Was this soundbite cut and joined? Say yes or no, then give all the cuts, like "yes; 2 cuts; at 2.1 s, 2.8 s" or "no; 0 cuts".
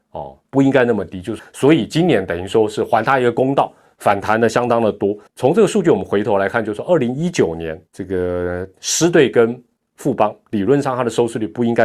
yes; 3 cuts; at 1.4 s, 5.3 s, 7.9 s